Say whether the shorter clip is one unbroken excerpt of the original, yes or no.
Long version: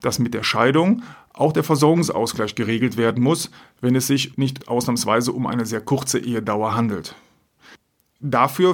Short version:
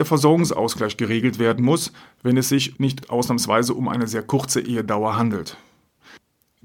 yes